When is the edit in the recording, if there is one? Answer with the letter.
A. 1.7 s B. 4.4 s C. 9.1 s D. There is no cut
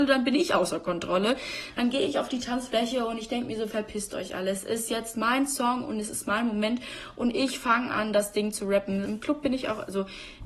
C